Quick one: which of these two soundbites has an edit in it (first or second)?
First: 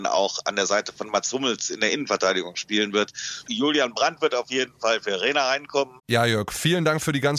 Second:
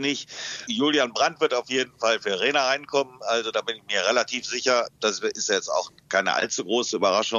first